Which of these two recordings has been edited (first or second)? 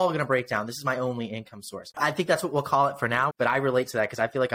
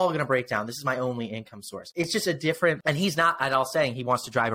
first